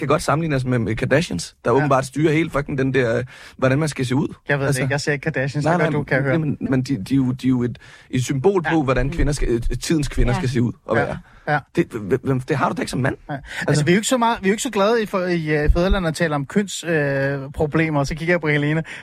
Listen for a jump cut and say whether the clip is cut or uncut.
cut